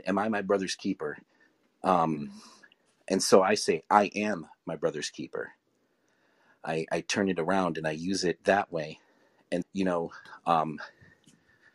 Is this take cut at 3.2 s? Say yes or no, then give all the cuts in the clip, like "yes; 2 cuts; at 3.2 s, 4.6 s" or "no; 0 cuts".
no; 2 cuts; at 1.8 s, 9.6 s